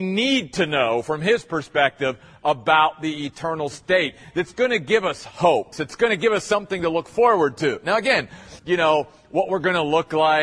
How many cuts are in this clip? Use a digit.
2